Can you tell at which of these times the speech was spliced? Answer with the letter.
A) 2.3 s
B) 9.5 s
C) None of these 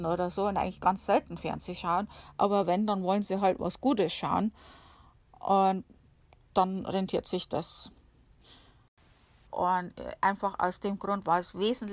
B